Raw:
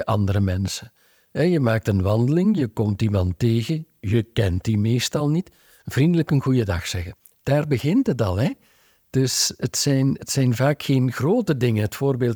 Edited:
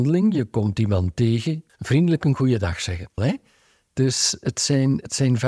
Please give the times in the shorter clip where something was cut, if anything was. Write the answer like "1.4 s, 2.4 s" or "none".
1.7 s, 3.2 s

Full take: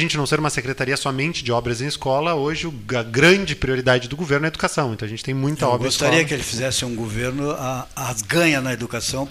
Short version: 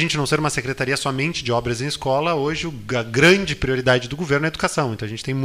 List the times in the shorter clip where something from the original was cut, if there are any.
none

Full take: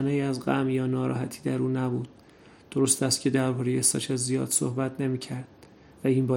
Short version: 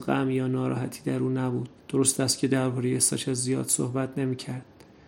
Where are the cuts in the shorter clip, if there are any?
1.8 s

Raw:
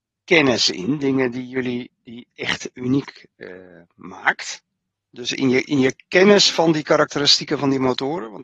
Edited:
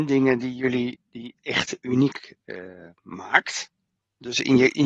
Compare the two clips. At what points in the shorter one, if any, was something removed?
none

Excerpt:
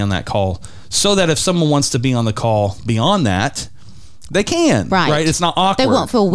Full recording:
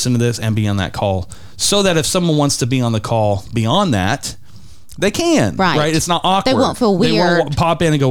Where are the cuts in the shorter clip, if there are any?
none

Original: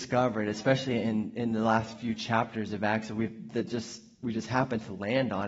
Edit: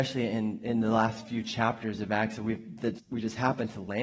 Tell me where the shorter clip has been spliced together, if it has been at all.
3.0 s

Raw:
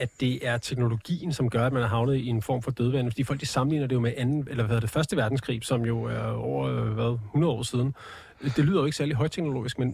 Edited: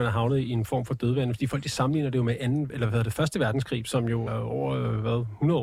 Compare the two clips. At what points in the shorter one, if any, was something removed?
4.3 s

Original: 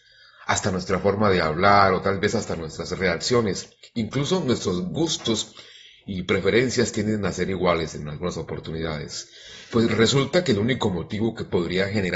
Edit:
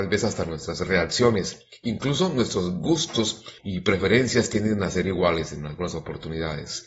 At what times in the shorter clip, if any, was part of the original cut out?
3.6 s

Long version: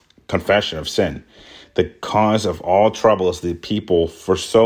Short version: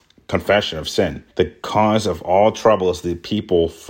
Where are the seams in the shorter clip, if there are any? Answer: 1.3 s

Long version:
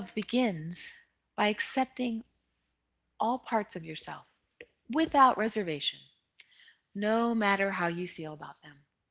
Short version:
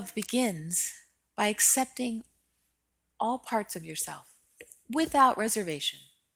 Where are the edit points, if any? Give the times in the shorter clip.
none

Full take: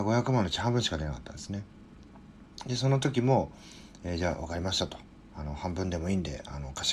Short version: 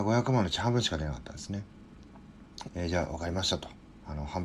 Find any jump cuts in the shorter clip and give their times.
2.7 s

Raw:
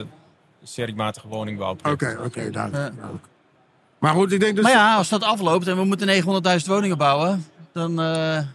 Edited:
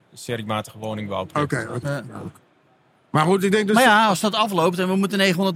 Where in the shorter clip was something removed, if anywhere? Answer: 1.8 s

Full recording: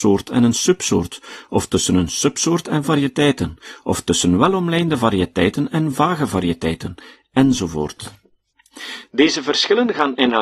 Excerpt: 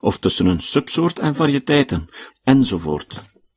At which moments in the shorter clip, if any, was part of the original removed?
2.3 s

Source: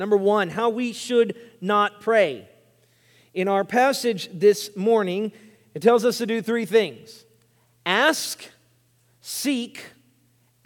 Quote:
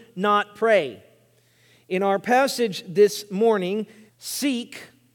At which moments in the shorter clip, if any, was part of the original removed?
4.1 s

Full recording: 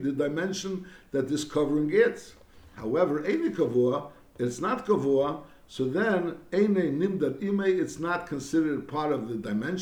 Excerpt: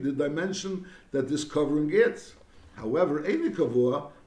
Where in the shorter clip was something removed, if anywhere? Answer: none

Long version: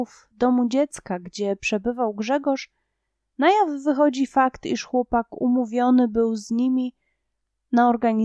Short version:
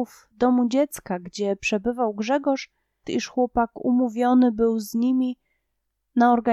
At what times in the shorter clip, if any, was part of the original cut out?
3.0 s

